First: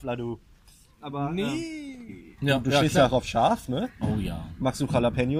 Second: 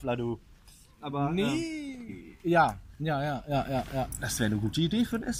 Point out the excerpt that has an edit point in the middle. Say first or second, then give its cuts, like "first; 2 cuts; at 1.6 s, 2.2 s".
first; 1 cut; at 2.4 s